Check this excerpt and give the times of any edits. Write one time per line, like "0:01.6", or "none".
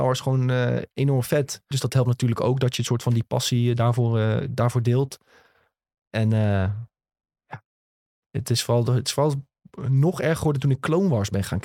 0:01.7